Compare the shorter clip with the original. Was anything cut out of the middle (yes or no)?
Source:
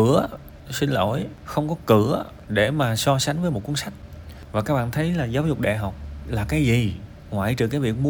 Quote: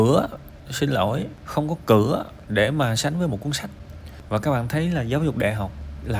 yes